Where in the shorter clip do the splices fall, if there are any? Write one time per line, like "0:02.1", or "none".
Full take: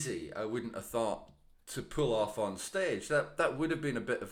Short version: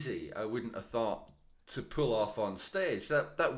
none